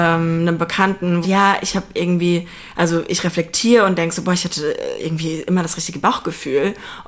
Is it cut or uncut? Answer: cut